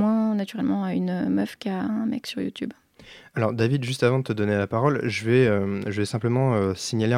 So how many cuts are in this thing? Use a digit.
0